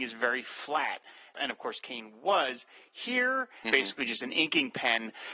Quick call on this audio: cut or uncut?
cut